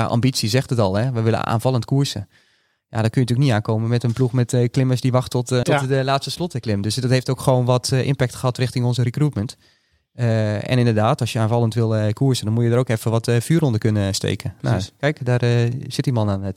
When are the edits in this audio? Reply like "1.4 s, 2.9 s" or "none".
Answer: 5.6 s